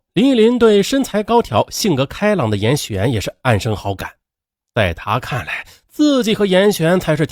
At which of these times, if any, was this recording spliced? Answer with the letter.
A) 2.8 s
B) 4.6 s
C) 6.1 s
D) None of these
D